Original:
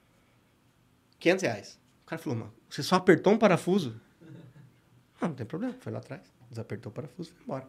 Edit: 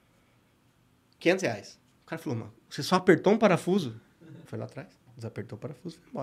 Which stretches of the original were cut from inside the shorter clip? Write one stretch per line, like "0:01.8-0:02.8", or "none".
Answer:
0:04.4-0:05.8